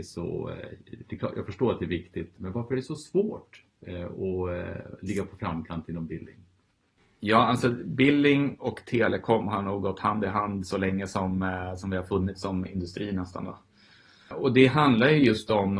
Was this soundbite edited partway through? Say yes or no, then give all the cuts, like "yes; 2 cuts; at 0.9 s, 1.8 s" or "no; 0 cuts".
no; 0 cuts